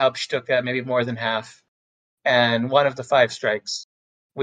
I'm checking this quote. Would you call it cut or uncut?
uncut